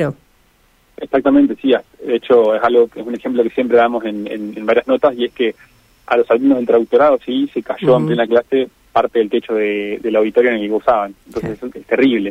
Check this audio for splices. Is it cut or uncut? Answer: uncut